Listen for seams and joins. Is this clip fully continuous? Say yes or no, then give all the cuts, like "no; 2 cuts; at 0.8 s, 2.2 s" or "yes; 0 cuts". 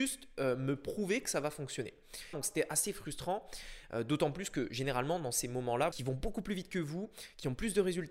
no; 2 cuts; at 2.3 s, 5.9 s